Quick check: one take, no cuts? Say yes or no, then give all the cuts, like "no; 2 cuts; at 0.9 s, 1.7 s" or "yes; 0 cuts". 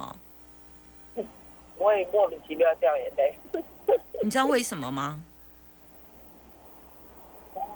yes; 0 cuts